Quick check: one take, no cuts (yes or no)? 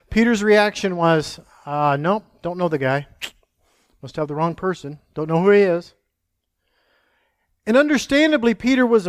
yes